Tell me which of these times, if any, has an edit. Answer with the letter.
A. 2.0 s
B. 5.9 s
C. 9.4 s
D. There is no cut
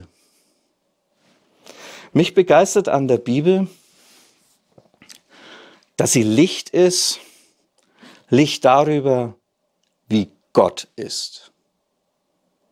D